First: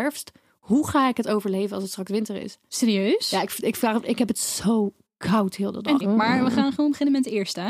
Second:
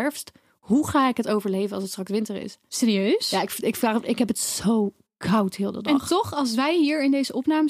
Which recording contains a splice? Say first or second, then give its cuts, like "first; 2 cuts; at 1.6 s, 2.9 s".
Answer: first; 1 cut; at 6.0 s